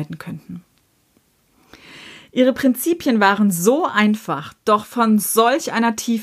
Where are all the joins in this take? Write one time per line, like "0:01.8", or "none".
none